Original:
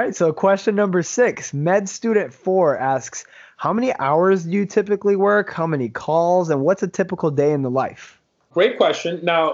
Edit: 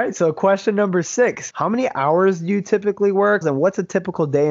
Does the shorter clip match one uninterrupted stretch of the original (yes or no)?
no